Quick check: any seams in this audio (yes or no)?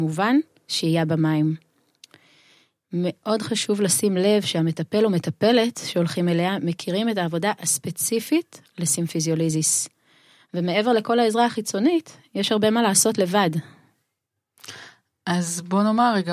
no